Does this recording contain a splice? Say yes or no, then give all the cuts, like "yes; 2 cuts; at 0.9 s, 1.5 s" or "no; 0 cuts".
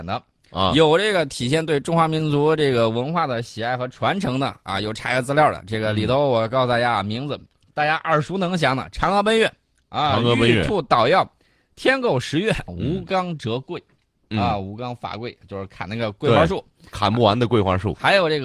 yes; 1 cut; at 12.7 s